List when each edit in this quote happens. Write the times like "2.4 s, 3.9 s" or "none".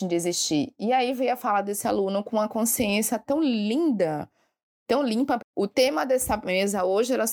5.4 s